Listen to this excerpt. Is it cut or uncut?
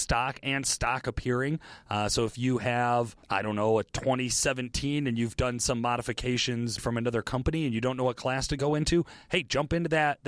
cut